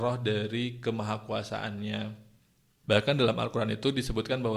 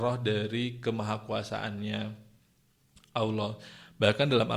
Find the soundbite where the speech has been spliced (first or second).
first